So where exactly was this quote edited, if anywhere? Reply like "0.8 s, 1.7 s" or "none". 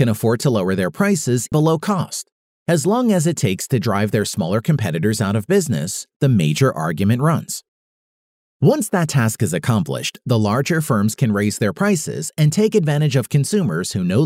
1.5 s